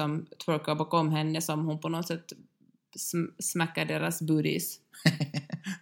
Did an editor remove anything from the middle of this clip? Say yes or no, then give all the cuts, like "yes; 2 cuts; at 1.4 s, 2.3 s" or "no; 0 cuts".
no; 0 cuts